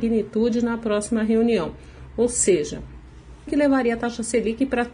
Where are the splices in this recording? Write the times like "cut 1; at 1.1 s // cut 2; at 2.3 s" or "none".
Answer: cut 1; at 3.5 s